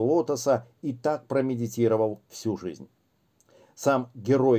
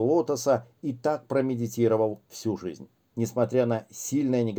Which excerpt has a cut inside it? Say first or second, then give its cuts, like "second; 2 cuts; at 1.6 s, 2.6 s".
second; 1 cut; at 3.1 s